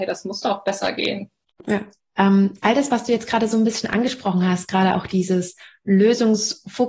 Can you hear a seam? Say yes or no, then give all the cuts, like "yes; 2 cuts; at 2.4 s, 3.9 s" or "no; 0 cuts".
no; 0 cuts